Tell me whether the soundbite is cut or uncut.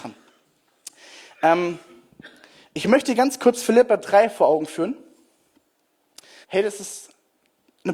cut